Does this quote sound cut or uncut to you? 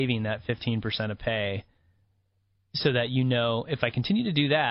uncut